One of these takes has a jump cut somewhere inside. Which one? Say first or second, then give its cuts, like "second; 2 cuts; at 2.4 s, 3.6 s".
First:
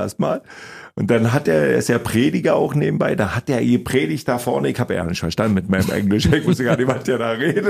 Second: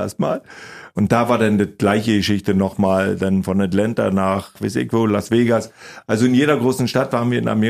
second; 1 cut; at 0.9 s